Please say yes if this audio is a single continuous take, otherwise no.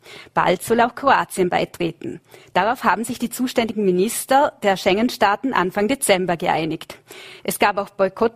no